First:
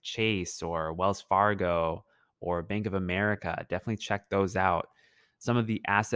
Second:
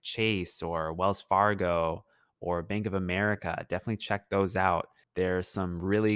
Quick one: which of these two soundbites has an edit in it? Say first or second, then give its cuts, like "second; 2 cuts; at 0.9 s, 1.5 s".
second; 1 cut; at 5.0 s